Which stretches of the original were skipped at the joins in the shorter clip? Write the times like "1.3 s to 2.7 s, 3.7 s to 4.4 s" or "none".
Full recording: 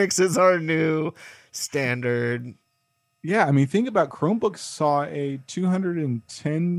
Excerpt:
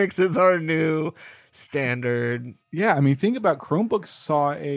2.6 s to 3.1 s